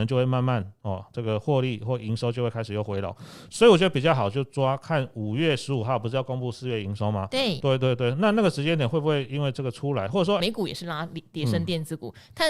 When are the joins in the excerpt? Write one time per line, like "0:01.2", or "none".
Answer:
0:07.6
0:10.4